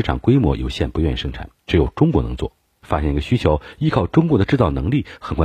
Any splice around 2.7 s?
yes; 1 cut; at 2.7 s

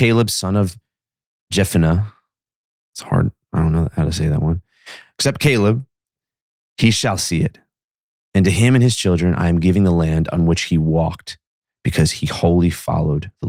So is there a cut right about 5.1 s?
no; 0 cuts

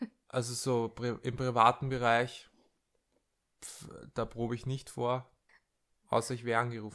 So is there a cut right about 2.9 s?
no; 1 cut; at 5.5 s

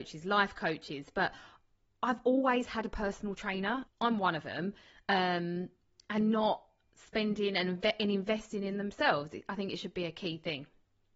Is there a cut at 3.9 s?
yes; 1 cut; at 3.9 s

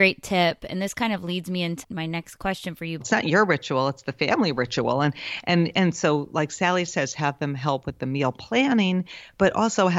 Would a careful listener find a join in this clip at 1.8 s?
yes; 2 cuts; at 1.8 s, 3.0 s

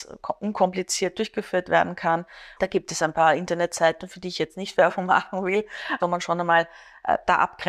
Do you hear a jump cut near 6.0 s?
yes; 2 cuts; at 2.6 s, 6.0 s

